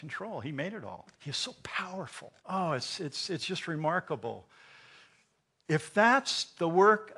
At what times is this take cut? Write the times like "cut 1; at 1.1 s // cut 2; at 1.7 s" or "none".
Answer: cut 1; at 1.1 s // cut 2; at 2.4 s